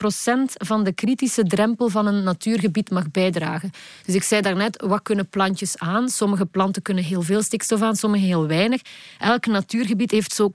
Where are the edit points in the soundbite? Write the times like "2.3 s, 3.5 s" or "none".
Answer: none

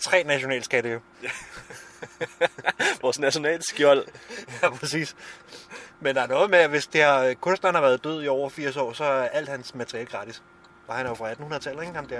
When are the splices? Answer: none

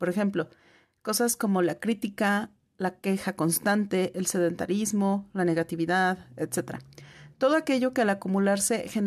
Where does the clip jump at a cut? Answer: none

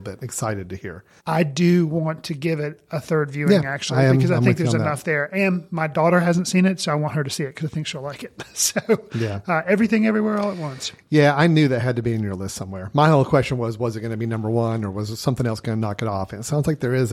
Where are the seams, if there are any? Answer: 1.2 s

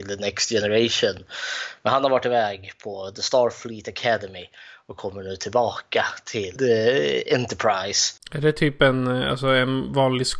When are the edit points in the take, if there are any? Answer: 6.6 s

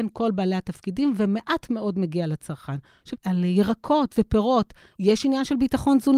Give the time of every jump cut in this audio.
3.1 s, 4.9 s

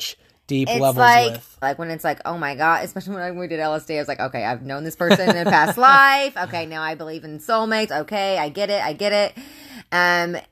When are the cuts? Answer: 1.6 s, 7.9 s

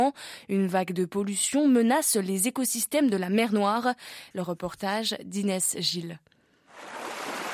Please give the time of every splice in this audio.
4.3 s

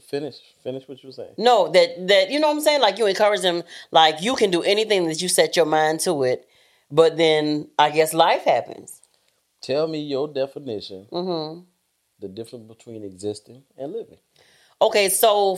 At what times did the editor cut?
none

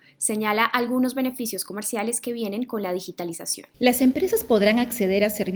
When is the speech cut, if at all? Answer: 3.7 s

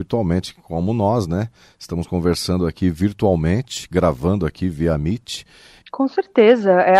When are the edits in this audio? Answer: 5.8 s

